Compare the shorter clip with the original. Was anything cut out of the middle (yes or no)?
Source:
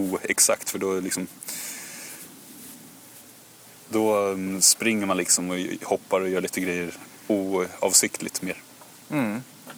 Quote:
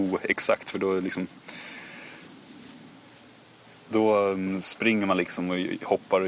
no